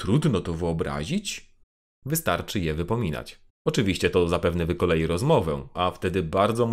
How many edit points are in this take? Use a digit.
2